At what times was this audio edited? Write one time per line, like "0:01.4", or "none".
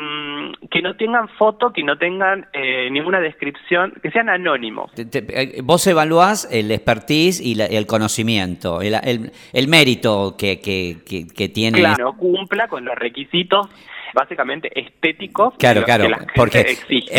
0:04.9
0:12.0
0:14.1